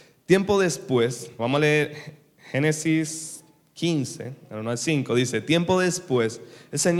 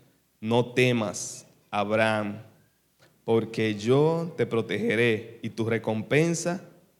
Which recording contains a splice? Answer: first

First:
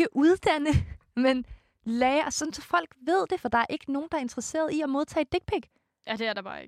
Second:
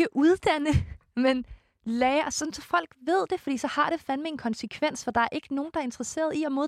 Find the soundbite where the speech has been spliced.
first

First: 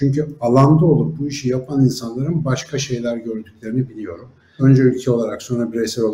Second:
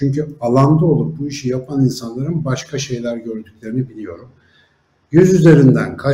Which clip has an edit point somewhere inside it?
first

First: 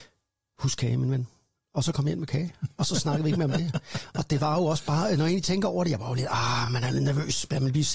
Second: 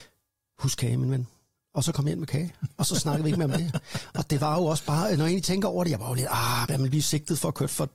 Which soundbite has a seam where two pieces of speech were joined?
second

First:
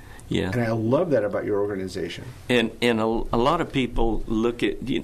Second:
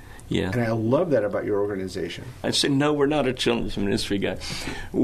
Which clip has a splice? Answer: second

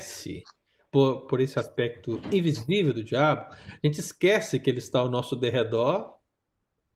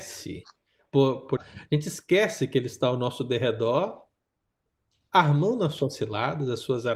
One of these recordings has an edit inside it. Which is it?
second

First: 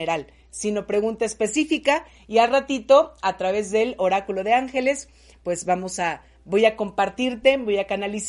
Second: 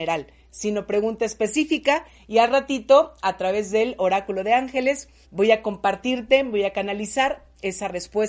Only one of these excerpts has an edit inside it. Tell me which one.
second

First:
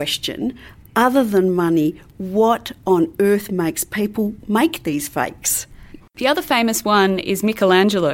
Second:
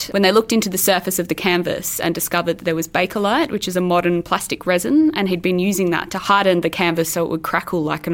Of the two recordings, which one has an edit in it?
first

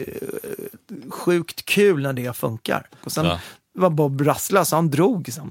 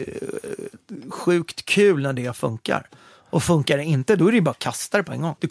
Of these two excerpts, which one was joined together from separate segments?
first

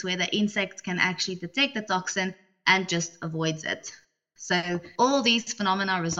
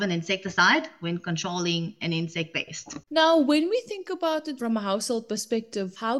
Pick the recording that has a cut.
second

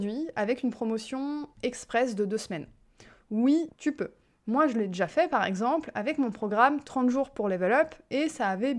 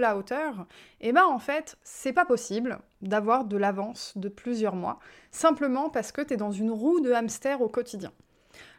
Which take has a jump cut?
first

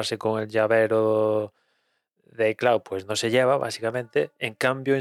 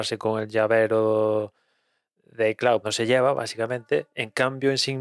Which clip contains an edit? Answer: second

